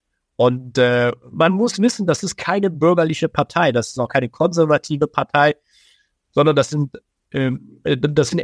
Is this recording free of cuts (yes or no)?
yes